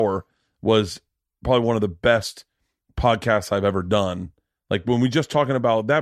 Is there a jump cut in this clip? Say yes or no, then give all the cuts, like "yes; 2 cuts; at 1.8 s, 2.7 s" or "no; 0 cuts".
no; 0 cuts